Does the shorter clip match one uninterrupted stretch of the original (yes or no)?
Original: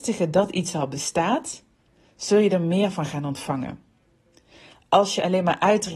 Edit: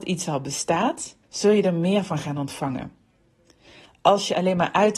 no